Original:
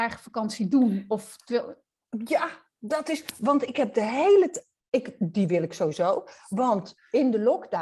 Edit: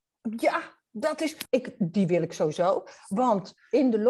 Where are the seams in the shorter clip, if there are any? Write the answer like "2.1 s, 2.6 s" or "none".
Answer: 1.5 s